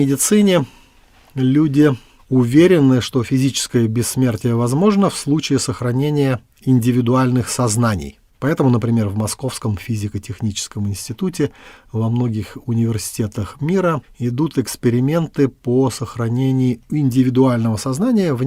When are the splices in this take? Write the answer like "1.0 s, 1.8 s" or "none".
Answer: none